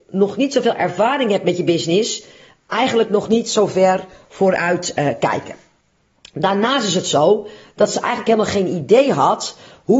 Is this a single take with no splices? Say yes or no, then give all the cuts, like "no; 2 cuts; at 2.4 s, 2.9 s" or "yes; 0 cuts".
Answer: yes; 0 cuts